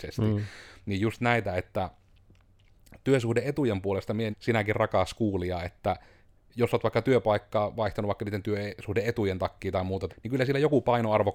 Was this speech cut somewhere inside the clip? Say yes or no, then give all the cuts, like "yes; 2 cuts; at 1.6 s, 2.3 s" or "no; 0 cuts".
yes; 2 cuts; at 4.3 s, 10.1 s